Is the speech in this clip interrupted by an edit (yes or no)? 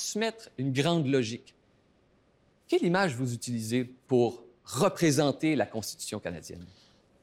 no